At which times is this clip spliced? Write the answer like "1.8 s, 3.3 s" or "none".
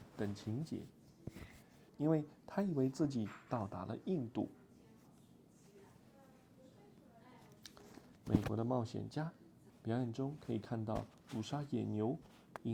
1.9 s, 8.2 s, 9.7 s